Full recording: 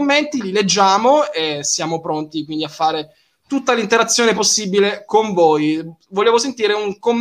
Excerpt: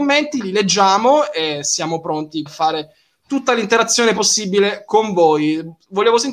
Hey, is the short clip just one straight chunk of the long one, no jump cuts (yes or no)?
no